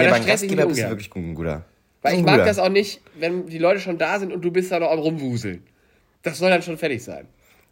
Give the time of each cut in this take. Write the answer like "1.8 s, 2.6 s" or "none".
none